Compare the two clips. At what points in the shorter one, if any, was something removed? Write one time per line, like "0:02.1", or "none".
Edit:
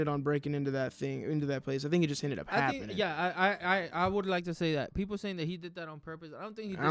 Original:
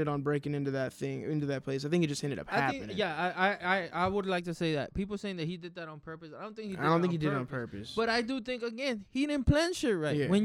none